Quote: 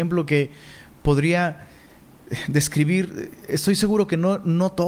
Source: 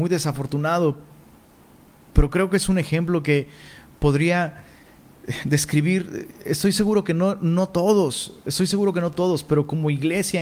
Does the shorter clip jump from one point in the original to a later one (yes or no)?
no